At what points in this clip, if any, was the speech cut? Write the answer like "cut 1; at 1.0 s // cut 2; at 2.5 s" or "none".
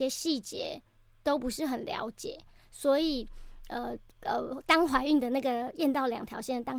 none